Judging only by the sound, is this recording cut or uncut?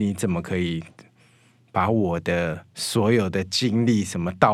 uncut